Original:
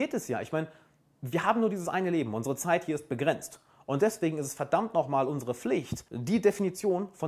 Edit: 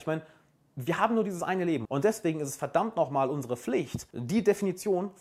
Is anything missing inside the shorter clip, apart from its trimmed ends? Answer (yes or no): yes